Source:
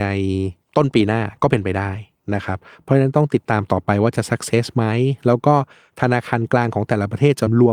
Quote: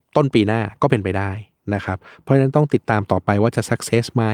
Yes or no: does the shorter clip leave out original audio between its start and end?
no